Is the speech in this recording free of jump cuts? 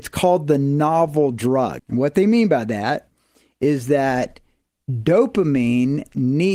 no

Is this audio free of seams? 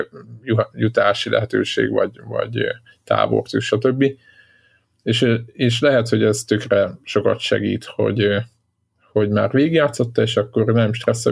yes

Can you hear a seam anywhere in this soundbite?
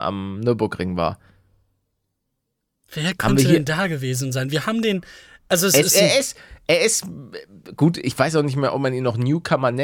no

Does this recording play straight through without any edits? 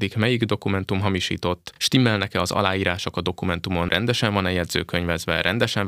yes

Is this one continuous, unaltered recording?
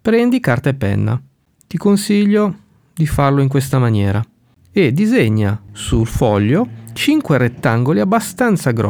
yes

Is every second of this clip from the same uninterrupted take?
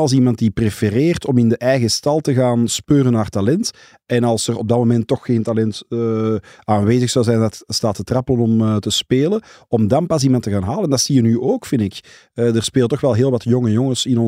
yes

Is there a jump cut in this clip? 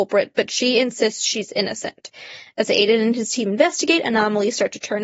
no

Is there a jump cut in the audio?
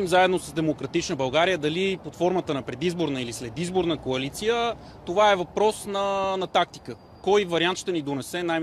no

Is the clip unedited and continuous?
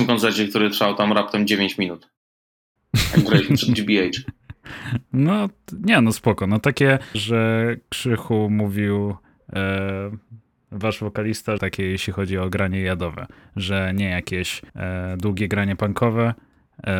no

